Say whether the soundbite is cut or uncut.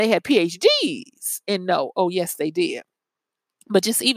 uncut